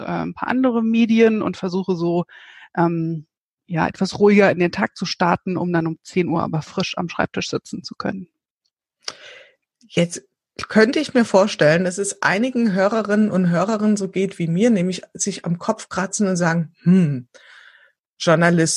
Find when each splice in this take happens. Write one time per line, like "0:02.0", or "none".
none